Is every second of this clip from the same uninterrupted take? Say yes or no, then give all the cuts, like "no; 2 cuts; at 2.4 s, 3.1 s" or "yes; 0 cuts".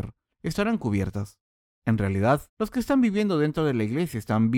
no; 1 cut; at 2.5 s